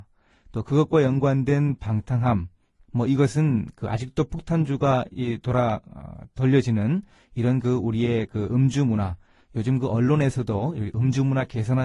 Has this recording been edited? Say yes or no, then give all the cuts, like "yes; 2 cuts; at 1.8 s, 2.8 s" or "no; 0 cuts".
yes; 1 cut; at 2.9 s